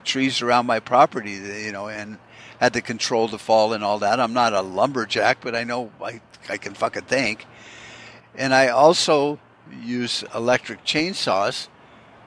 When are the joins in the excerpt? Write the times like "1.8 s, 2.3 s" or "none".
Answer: 8.2 s